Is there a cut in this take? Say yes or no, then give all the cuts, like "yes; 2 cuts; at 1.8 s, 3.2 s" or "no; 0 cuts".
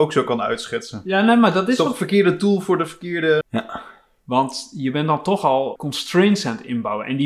yes; 2 cuts; at 3.4 s, 5.8 s